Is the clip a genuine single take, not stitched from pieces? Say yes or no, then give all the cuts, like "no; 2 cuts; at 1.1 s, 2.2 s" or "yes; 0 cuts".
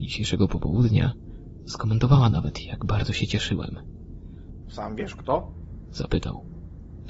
no; 1 cut; at 4.6 s